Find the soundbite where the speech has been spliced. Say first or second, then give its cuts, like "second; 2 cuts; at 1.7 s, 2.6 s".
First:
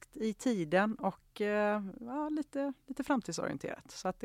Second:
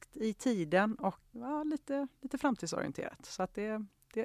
second; 1 cut; at 1.3 s